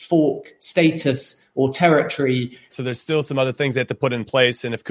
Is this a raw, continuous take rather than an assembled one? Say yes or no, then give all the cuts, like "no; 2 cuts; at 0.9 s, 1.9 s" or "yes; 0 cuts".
no; 1 cut; at 2.7 s